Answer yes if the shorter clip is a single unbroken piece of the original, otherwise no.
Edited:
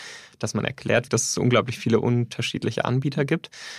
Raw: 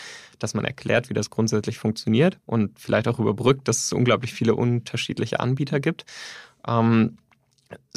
no